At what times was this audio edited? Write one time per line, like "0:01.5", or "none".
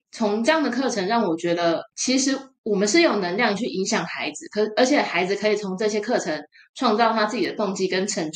none